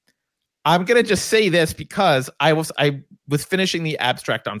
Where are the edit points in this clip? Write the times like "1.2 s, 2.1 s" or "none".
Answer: 2.7 s